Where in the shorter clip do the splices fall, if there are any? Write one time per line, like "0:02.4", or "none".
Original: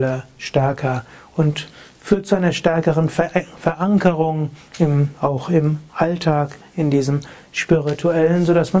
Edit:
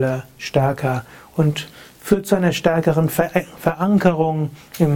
none